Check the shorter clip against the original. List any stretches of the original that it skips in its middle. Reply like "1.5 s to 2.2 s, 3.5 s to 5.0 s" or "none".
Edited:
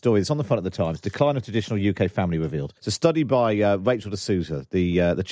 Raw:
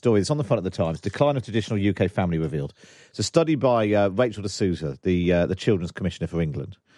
2.8 s to 3.1 s